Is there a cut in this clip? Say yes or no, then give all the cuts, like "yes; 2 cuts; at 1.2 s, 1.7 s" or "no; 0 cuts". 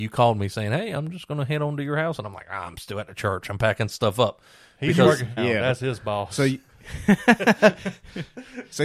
yes; 1 cut; at 5.4 s